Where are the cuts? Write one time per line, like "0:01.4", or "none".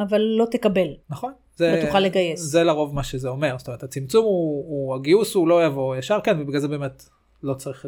0:01.0